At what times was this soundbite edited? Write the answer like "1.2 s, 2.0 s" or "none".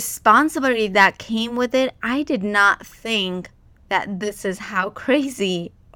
none